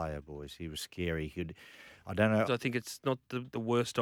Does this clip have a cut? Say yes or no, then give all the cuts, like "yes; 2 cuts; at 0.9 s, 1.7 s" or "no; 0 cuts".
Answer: yes; 1 cut; at 2.5 s